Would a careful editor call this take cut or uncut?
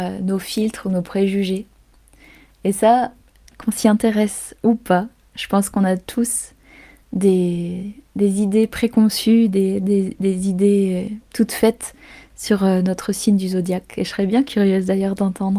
uncut